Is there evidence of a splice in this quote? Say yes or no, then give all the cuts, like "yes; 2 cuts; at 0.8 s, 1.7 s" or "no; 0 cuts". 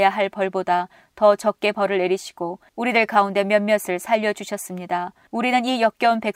no; 0 cuts